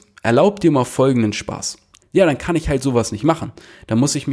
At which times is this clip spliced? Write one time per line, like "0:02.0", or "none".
0:02.0